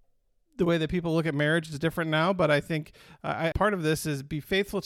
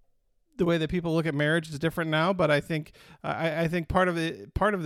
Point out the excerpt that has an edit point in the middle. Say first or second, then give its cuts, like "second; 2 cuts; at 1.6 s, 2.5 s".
first; 1 cut; at 3.5 s